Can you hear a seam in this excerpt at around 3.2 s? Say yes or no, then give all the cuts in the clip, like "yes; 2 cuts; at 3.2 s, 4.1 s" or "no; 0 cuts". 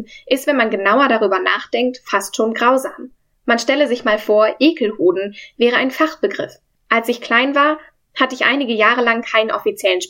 no; 1 cut; at 6.7 s